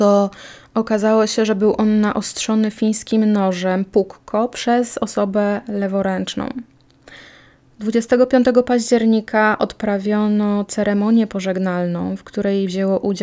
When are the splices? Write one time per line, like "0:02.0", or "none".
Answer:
none